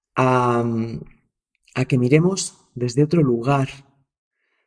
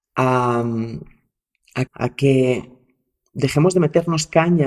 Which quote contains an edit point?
second; 1 cut; at 1.9 s

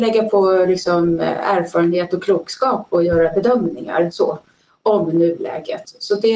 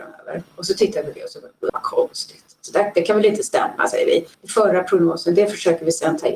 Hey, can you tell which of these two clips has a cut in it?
second; 2 cuts; at 1.7 s, 4.3 s

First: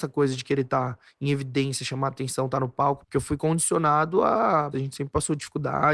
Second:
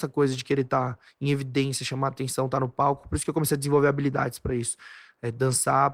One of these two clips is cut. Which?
first; 2 cuts; at 3.0 s, 4.7 s

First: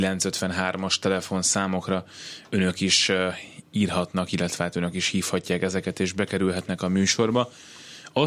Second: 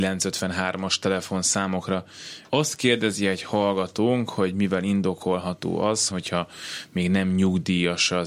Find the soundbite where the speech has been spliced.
second; 2 cuts; at 2.5 s, 6.1 s

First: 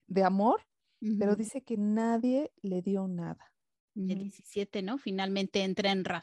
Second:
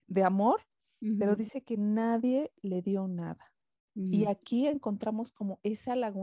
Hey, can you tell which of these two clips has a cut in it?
first; 1 cut; at 4.1 s

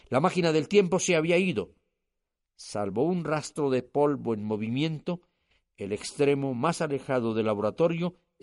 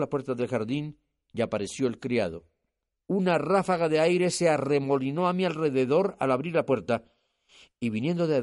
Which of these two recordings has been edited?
second; 1 cut; at 3.0 s

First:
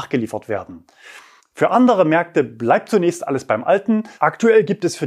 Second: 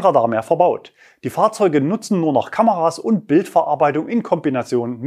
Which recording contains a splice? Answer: first; 1 cut; at 4.1 s

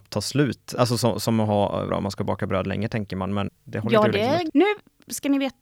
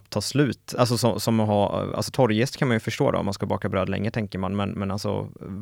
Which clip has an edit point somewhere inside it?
first; 3 cuts; at 1.9 s, 3.5 s, 4.5 s

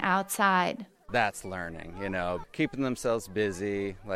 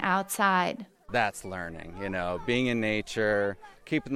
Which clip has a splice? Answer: first; 1 cut; at 2.4 s

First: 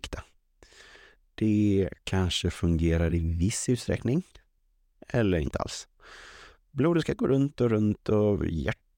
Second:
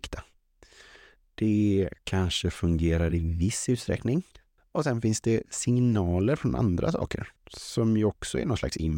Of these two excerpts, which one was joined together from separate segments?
second; 2 cuts; at 4.6 s, 7.4 s

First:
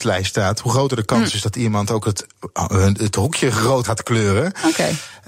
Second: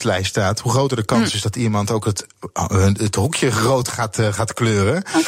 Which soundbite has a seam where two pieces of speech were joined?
first; 1 cut; at 3.8 s

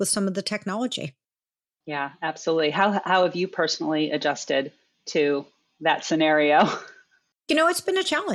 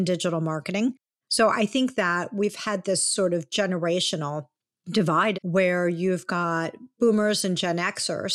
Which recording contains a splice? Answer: second; 2 cuts; at 1.2 s, 5.3 s

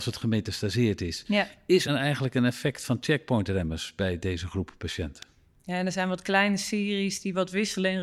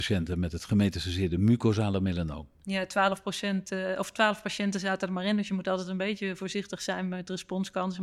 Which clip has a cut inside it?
first; 1 cut; at 1.9 s

